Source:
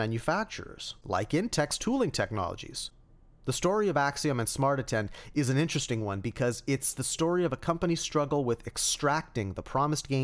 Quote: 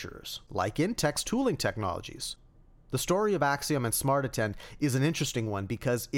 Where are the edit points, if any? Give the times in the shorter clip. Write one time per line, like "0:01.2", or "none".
none